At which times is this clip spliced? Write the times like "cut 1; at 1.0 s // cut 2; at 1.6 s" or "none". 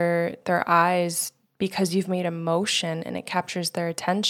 none